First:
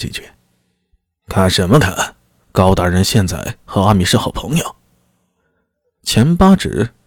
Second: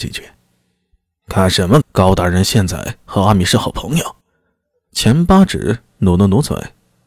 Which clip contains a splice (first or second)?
second